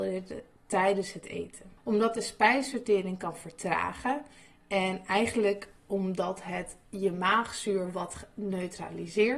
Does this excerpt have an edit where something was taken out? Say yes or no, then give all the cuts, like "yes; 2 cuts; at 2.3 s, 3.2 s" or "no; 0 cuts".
yes; 1 cut; at 1.8 s